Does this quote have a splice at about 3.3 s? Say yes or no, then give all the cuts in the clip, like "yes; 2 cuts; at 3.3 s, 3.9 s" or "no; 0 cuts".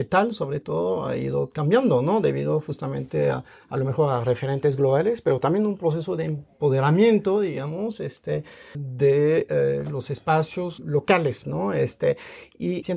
no; 2 cuts; at 8.7 s, 11.4 s